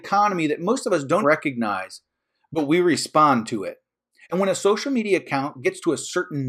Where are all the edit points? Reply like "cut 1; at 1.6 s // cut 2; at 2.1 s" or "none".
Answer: cut 1; at 1.2 s // cut 2; at 4.2 s